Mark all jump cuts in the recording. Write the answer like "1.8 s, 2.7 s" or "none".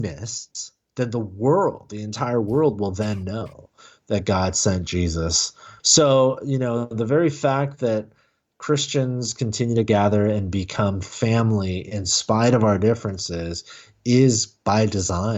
5.8 s